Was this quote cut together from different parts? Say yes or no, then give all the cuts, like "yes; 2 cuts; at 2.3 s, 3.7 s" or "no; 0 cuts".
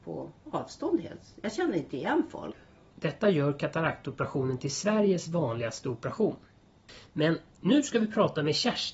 yes; 1 cut; at 2.9 s